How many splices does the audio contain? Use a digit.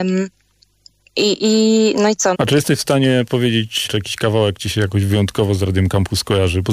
2